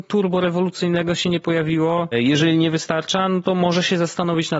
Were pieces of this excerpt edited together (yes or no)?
yes